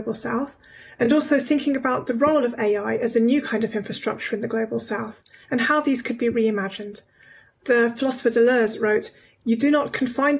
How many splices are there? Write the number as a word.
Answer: zero